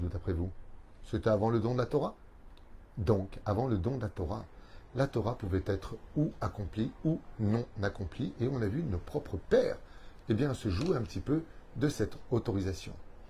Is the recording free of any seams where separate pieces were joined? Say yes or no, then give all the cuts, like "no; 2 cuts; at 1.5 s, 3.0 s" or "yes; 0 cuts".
yes; 0 cuts